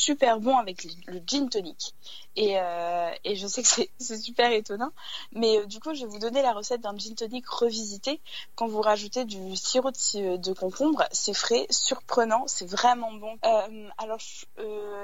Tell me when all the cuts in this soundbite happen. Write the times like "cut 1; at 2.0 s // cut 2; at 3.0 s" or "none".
cut 1; at 13.4 s